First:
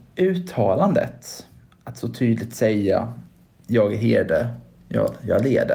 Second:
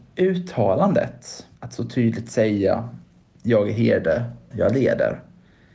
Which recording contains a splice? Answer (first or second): second